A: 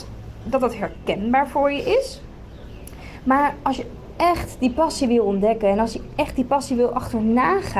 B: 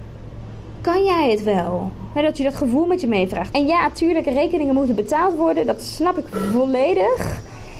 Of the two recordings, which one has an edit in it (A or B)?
B